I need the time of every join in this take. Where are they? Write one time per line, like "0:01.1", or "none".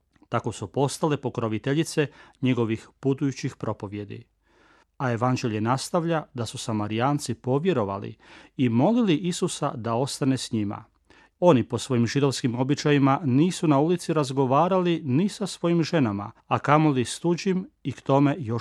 0:04.8
0:11.3
0:16.4